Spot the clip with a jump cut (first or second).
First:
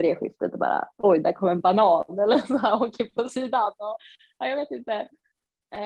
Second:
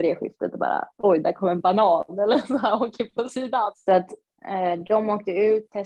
second